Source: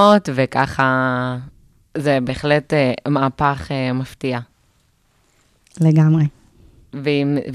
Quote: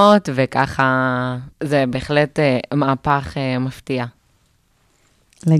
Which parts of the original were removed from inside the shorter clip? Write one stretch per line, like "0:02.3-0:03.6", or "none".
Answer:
0:01.5-0:01.9